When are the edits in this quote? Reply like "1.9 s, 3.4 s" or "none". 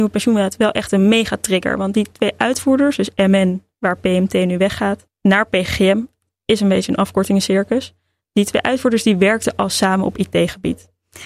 none